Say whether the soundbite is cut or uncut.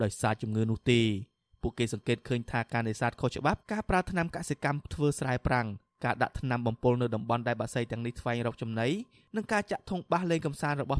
cut